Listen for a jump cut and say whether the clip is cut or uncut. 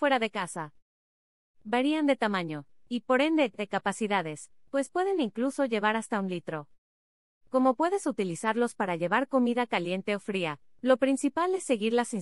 cut